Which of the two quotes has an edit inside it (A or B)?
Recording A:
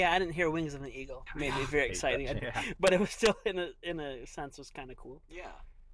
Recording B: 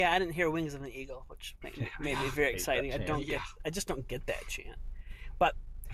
A